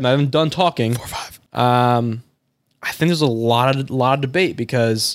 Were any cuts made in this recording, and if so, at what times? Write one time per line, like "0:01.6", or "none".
0:01.5